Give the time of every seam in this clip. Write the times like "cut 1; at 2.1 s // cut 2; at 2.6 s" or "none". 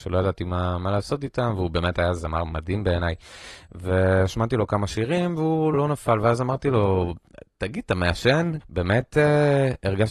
cut 1; at 5.7 s // cut 2; at 8.6 s